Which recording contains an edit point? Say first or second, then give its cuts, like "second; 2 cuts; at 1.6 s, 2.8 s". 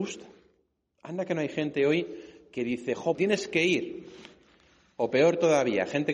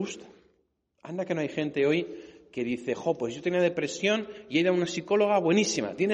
first; 1 cut; at 3.2 s